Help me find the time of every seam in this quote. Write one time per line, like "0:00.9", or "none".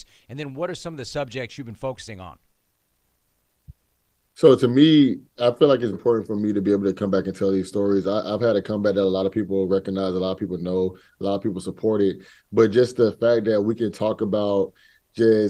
0:05.9